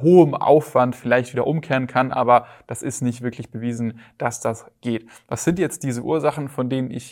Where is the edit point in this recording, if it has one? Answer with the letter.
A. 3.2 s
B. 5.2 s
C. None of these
C